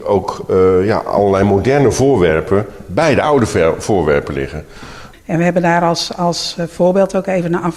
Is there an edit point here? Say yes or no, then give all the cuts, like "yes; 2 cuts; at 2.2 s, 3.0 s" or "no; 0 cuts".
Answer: yes; 1 cut; at 5.1 s